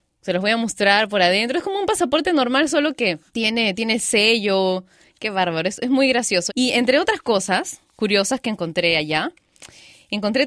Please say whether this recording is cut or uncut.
cut